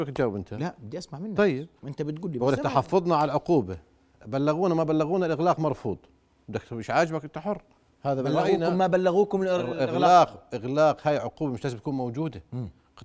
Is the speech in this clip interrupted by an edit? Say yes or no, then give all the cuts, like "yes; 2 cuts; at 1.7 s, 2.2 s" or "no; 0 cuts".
no; 0 cuts